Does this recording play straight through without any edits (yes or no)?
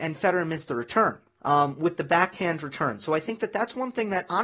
no